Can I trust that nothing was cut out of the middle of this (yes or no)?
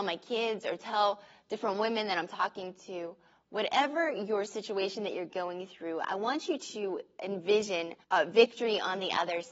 no